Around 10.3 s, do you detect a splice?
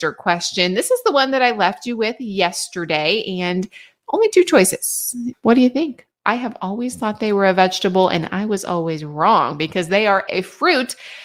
yes; 2 cuts; at 5.3 s, 10.3 s

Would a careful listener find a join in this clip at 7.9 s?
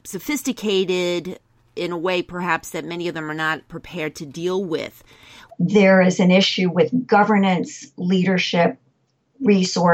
no; 1 cut; at 5.5 s

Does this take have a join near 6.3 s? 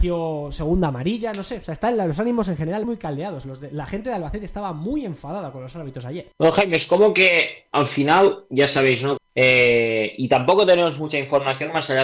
yes; 3 cuts; at 2.8 s, 6.3 s, 9.2 s

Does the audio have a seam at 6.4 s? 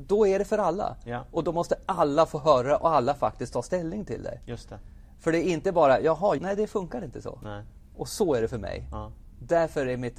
yes; 1 cut; at 6.4 s

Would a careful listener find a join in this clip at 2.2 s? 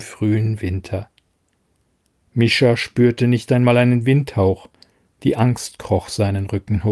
yes; 1 cut; at 2.2 s

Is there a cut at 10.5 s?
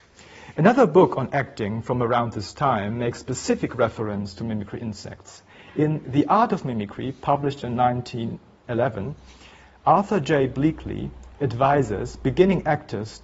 no; 0 cuts

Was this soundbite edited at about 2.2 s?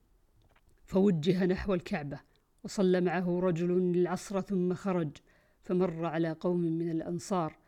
no; 0 cuts

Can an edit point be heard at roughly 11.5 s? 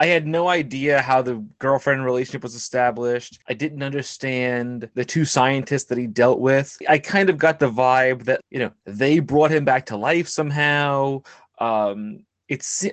no; 1 cut; at 8.4 s

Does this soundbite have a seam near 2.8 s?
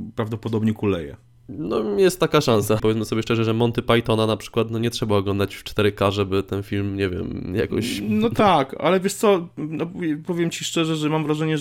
yes; 1 cut; at 2.8 s

